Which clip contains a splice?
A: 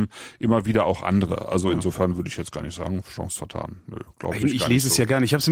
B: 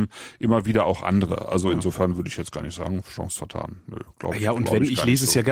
A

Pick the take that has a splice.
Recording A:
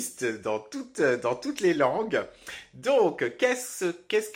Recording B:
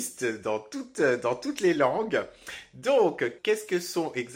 B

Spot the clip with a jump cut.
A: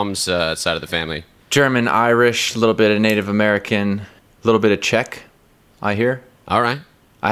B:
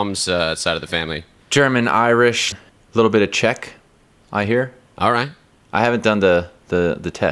B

